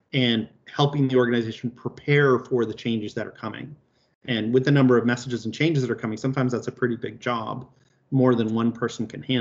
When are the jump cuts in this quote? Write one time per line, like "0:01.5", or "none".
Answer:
none